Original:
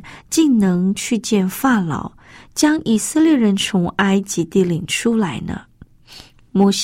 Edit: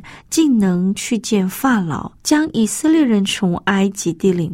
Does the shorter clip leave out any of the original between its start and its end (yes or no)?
yes